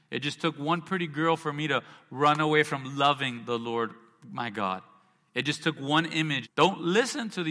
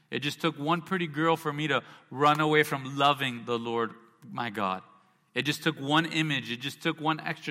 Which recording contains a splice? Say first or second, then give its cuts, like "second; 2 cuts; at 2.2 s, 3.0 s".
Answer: first; 1 cut; at 6.4 s